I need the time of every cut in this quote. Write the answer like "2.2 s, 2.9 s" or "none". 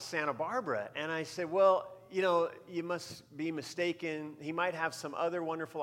none